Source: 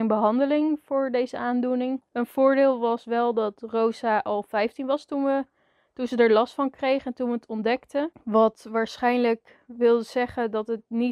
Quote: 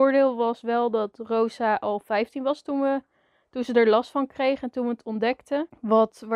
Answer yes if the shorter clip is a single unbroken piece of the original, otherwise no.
yes